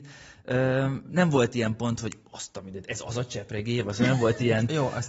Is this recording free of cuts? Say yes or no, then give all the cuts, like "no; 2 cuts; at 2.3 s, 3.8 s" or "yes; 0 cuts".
yes; 0 cuts